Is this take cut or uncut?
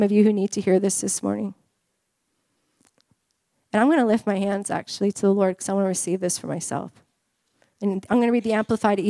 uncut